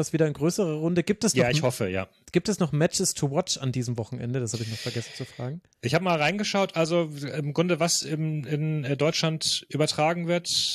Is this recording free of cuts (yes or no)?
yes